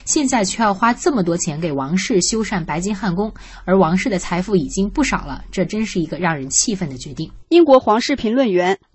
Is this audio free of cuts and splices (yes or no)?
yes